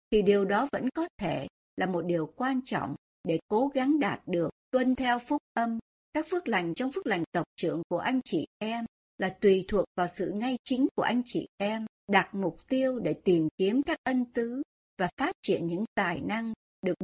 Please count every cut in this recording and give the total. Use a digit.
2